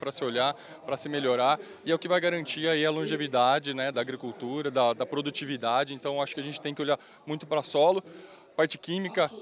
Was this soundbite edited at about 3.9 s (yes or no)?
yes